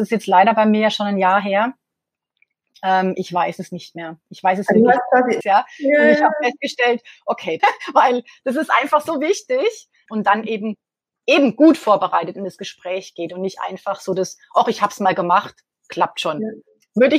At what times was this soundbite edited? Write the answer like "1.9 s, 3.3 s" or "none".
5.4 s, 7.6 s, 10.1 s